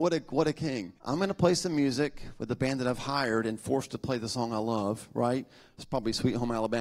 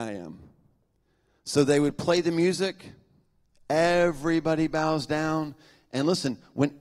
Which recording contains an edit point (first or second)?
first